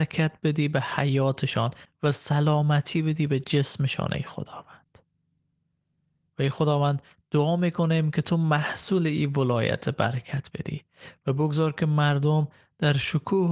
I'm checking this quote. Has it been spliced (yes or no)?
no